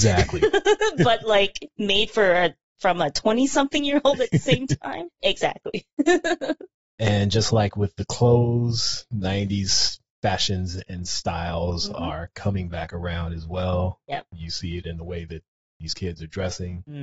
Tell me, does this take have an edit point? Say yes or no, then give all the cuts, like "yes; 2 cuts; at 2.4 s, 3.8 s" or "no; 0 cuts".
yes; 1 cut; at 5.2 s